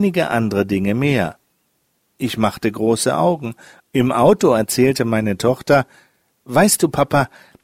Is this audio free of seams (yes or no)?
no